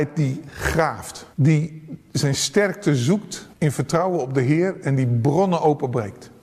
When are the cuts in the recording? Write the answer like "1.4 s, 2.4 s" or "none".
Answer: 1.3 s, 3.5 s